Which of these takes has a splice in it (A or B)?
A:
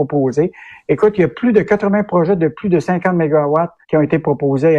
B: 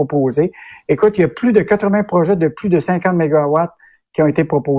A